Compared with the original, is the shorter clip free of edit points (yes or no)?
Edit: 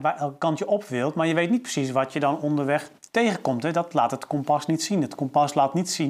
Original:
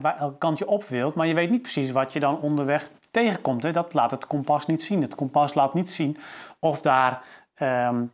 yes